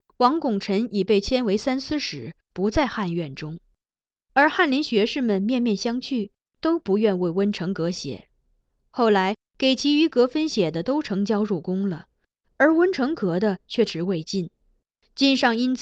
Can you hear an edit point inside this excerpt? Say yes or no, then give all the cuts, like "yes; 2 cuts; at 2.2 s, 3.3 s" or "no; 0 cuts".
yes; 1 cut; at 13.9 s